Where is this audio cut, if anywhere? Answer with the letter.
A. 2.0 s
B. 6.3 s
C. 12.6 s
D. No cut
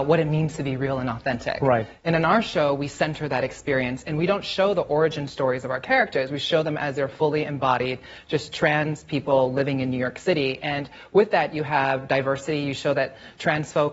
D